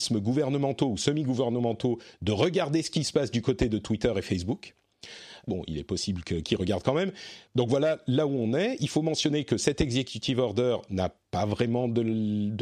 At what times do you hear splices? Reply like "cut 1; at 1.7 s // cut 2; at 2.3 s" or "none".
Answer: cut 1; at 5.5 s // cut 2; at 7.5 s